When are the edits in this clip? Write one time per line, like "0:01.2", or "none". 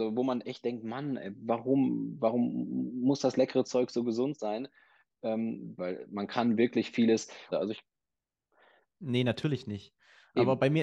0:05.8
0:07.5